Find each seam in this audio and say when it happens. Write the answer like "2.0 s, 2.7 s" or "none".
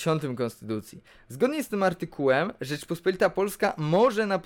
none